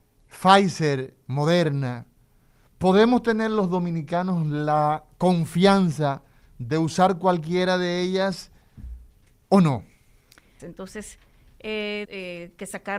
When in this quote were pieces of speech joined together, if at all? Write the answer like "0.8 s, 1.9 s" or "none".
10.6 s, 12.0 s

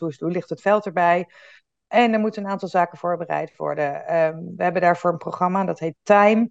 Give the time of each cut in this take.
none

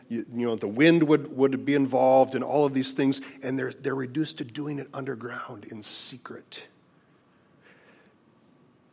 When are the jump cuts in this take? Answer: none

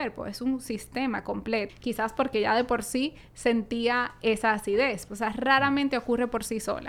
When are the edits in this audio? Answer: 1.7 s, 5.1 s

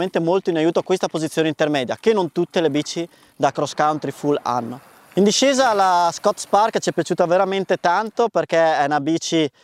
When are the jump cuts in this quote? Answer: none

